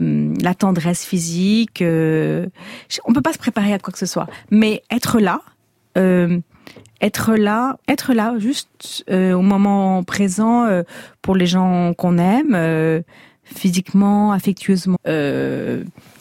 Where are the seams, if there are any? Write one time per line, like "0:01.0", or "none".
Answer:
0:07.8
0:15.0